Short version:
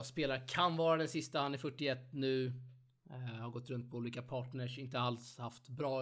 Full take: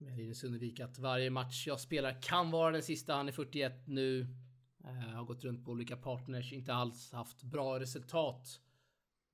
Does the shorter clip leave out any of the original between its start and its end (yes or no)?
no